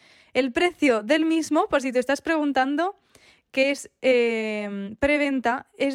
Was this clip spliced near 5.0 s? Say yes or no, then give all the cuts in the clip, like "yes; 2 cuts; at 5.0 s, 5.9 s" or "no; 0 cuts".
no; 0 cuts